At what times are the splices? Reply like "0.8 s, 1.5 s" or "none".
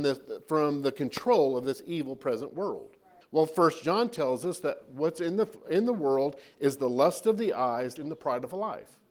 3.2 s, 8.0 s